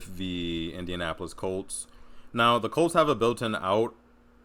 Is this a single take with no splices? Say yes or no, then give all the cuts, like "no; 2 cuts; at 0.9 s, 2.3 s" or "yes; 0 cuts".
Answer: yes; 0 cuts